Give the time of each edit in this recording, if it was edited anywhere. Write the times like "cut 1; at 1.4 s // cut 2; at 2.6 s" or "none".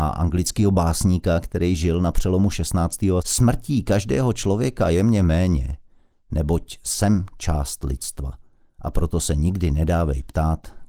cut 1; at 3.2 s